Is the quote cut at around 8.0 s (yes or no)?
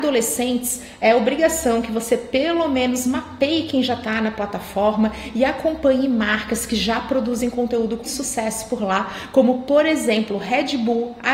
yes